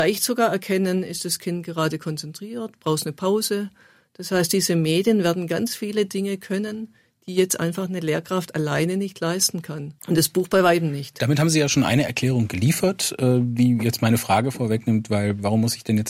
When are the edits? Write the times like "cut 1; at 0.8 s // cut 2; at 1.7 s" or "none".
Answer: cut 1; at 10.0 s